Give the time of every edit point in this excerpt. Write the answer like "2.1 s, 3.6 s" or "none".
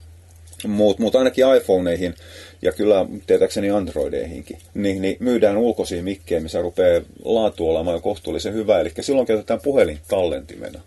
4.7 s